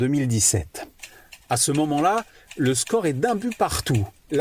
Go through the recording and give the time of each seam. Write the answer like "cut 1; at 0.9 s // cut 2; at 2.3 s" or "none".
none